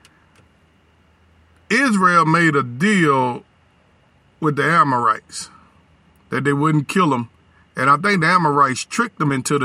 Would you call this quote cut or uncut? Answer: uncut